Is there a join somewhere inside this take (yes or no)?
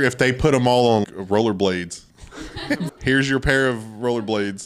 yes